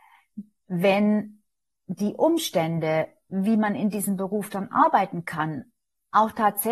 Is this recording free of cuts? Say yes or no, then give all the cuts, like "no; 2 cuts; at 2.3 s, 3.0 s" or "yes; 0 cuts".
yes; 0 cuts